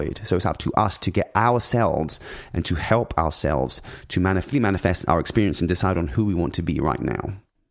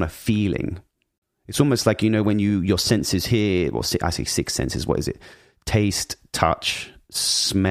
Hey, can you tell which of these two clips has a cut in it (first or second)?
first